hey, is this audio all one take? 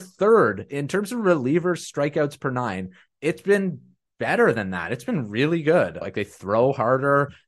no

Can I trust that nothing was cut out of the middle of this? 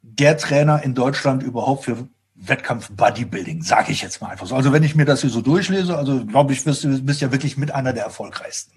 yes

